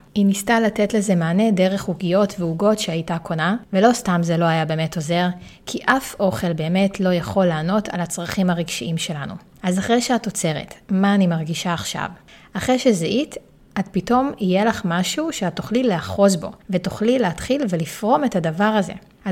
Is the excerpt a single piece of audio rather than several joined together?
no; 1 cut; at 10.9 s

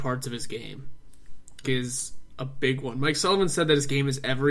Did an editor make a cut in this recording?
yes; 1 cut; at 1.6 s

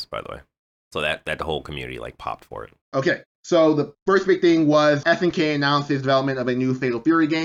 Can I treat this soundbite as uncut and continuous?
no; 2 cuts; at 2.8 s, 5.0 s

